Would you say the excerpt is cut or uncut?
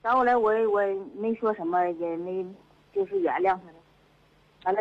uncut